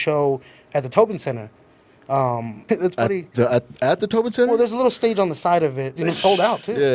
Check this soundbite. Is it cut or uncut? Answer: cut